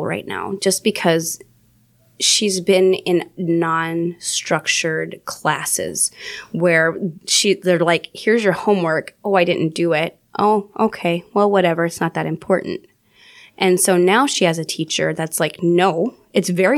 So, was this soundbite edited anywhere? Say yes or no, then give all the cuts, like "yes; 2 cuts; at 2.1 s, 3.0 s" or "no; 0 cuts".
no; 0 cuts